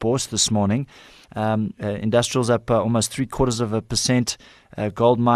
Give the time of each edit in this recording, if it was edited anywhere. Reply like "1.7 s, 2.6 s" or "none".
1.2 s